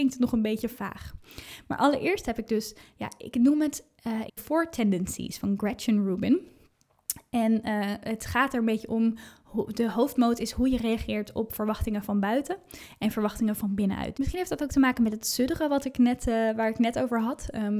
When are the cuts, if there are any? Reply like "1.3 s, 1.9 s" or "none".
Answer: 4.3 s, 14.1 s